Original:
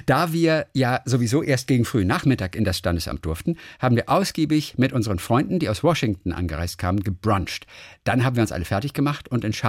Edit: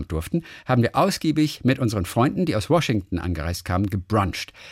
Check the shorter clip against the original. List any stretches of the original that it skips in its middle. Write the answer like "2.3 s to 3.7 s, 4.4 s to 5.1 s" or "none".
none

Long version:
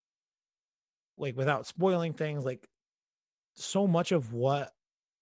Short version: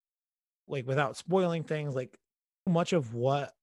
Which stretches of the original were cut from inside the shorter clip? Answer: 3.2 s to 3.9 s

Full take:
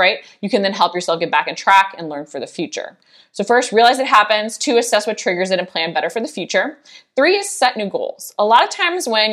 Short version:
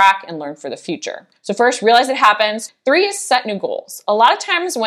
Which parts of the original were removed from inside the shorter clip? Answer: 3.1 s to 3.3 s, 4.6 s to 7.0 s

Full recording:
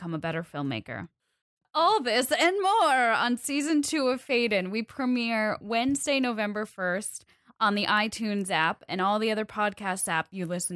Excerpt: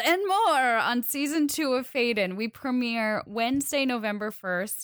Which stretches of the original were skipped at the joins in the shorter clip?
none

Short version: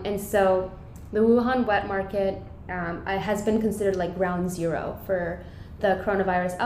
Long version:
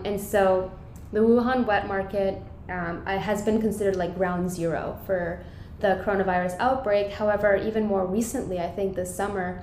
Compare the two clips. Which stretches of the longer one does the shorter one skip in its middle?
none

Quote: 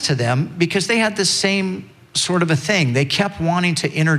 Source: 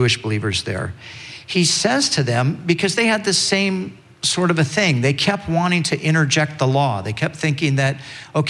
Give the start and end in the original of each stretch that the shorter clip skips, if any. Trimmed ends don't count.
none

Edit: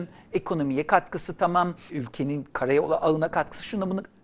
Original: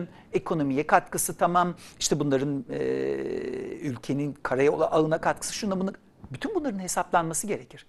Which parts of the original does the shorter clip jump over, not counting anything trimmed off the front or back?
1.9 s to 3.8 s

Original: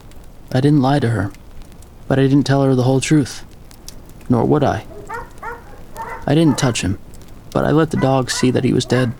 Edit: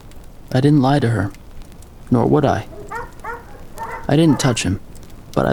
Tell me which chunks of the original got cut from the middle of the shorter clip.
2.0 s to 4.2 s

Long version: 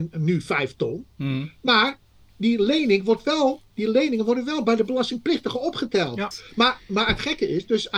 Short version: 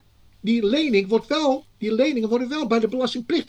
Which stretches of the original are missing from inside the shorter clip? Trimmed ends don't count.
none

